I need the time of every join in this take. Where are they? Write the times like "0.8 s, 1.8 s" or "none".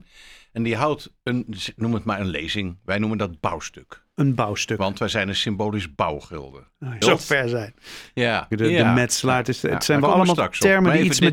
1.2 s, 7.0 s, 8.5 s